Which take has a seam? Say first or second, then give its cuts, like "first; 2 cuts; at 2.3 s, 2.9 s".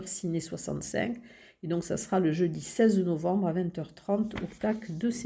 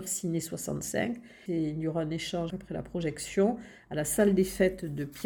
second; 2 cuts; at 1.5 s, 2.5 s